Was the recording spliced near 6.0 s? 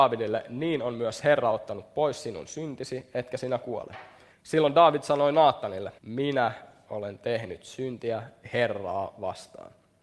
yes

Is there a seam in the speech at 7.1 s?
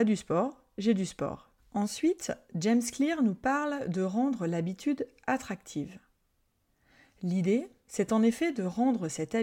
no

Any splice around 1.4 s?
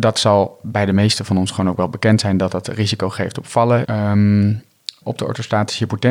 no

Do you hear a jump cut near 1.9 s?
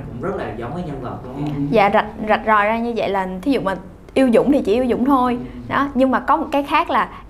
no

